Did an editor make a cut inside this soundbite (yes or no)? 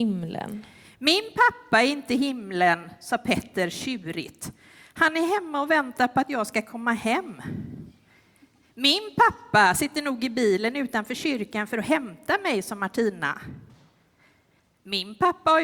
no